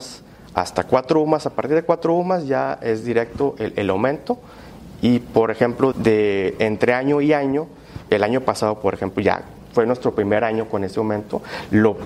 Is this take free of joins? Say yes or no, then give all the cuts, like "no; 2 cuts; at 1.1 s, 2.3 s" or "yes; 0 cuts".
no; 2 cuts; at 5.9 s, 8.1 s